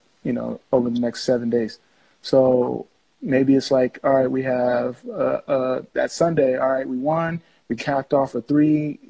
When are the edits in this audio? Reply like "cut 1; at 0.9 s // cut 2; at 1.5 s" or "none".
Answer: none